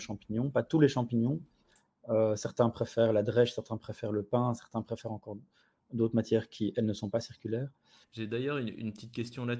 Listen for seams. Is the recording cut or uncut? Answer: cut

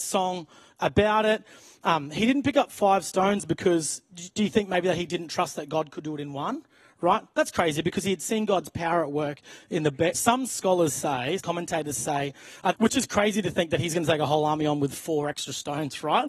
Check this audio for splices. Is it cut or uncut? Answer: cut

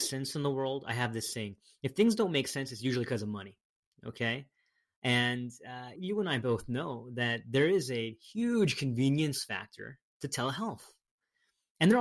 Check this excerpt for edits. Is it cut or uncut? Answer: cut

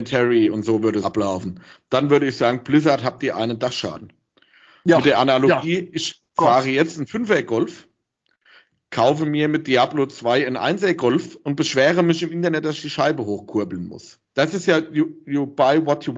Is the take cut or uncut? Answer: cut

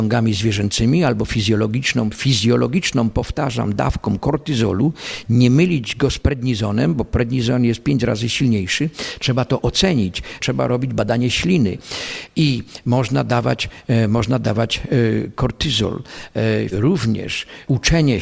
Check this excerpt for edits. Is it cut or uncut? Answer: cut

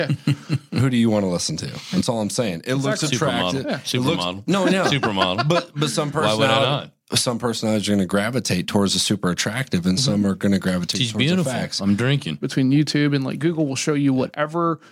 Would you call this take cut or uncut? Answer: cut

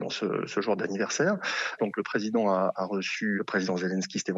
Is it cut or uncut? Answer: cut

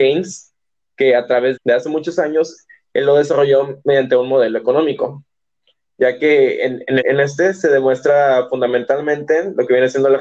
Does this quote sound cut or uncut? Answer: cut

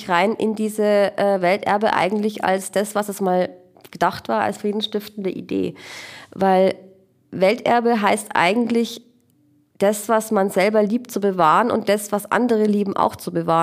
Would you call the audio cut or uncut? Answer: uncut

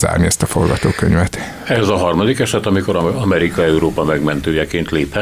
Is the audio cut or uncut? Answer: uncut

